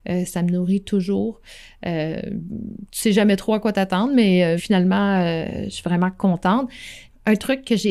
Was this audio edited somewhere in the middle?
yes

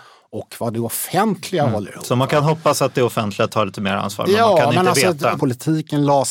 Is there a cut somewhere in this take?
yes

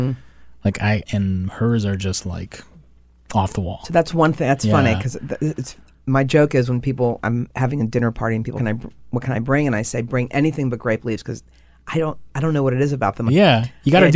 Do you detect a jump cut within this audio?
yes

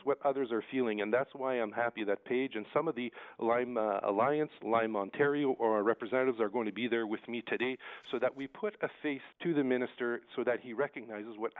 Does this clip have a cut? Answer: yes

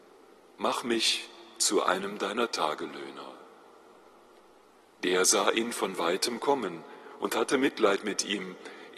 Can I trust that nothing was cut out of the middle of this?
no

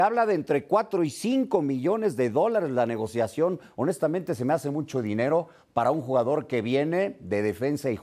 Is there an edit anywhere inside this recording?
no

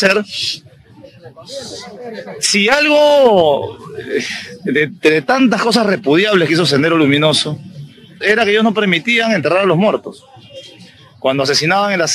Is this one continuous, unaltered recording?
no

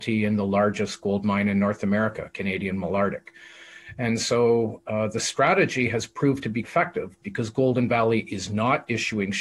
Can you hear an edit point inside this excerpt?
yes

